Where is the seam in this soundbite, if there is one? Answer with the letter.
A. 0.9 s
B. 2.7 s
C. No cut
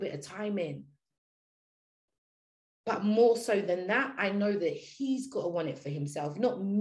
C